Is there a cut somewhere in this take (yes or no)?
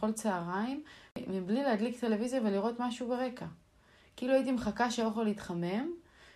no